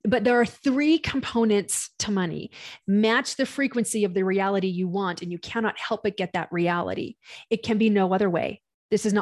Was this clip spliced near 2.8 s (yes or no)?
yes